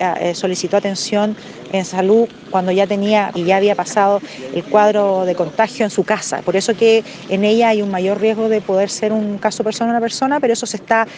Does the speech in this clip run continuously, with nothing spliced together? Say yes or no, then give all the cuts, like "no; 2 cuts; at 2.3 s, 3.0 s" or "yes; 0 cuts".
no; 1 cut; at 3.3 s